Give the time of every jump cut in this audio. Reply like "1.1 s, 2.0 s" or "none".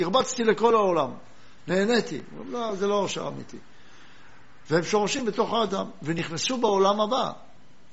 4.7 s